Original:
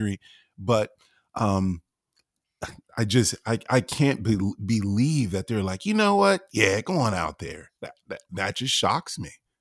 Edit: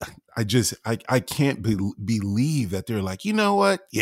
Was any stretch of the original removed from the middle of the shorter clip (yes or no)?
no